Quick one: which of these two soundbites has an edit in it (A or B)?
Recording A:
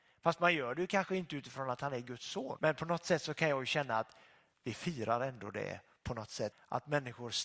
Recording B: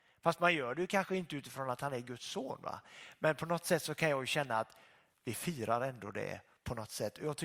A